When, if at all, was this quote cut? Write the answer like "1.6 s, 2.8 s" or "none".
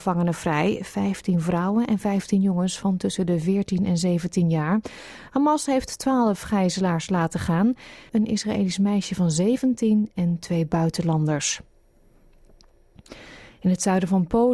8.1 s